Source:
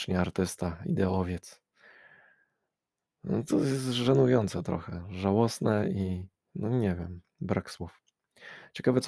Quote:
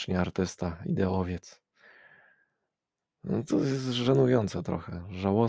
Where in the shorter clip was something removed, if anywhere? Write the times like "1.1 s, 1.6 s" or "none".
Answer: none